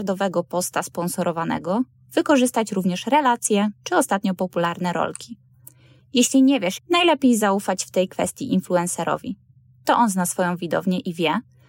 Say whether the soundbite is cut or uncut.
cut